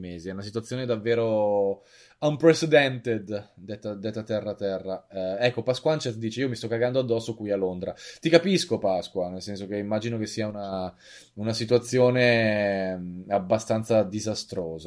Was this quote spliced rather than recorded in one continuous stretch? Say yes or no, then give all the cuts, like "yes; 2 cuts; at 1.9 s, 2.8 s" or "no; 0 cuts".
no; 0 cuts